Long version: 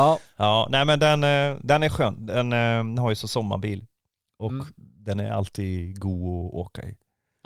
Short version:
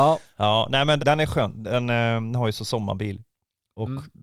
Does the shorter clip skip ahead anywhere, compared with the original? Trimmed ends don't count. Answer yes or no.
yes